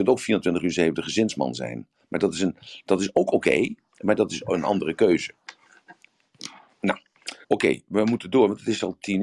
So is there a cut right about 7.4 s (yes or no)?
yes